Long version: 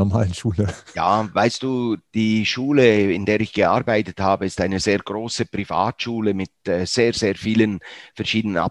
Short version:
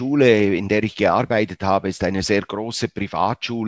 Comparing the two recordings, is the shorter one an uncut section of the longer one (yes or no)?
yes